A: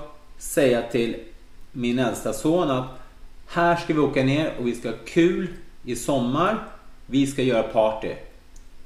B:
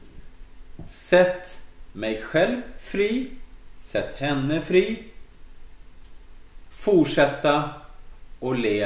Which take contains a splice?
B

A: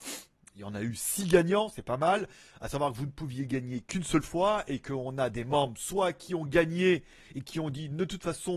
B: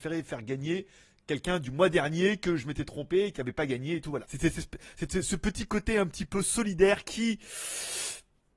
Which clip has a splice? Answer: B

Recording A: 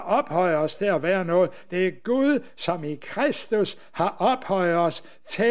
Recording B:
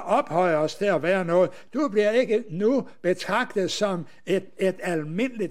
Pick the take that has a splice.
B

